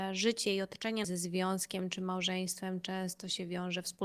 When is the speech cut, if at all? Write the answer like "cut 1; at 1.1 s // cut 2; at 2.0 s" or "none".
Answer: cut 1; at 1.0 s